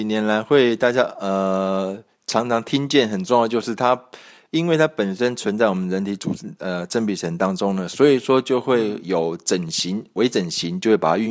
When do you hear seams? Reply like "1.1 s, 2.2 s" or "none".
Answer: none